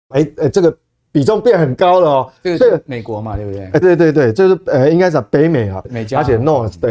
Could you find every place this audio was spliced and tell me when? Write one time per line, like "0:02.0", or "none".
0:03.8
0:05.8

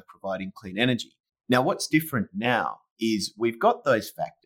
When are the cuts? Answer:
0:01.3

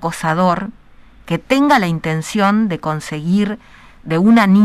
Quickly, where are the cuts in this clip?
none

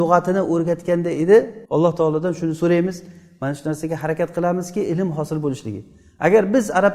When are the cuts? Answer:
0:01.6

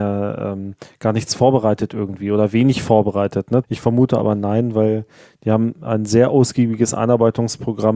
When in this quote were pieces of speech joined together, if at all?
0:03.6

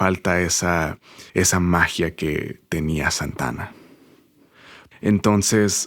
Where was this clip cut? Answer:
0:01.3
0:04.9

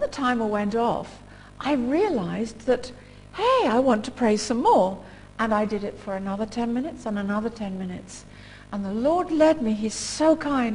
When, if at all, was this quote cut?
none

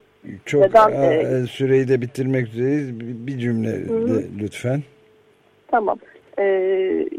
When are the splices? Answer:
none

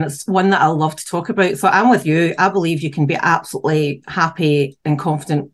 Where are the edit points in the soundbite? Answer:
none

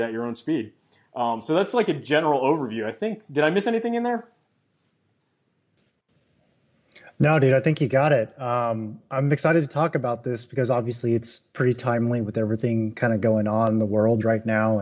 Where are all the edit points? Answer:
none

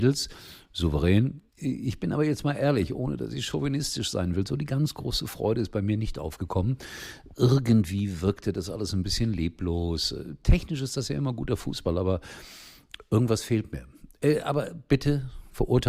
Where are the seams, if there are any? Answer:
0:01.5

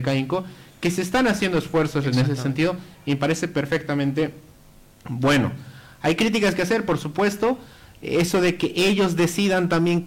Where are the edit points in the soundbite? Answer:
none

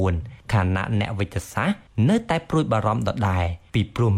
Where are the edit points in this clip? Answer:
none

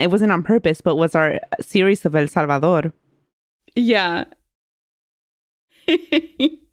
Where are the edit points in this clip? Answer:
none

